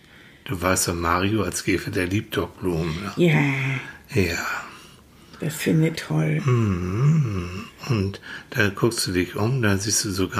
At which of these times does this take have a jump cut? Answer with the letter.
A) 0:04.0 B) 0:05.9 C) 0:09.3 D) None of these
B